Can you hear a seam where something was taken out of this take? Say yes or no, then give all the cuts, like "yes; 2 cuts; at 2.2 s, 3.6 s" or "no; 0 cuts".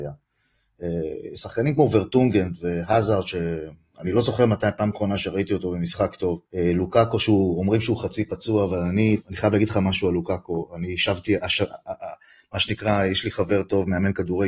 yes; 2 cuts; at 6.5 s, 9.2 s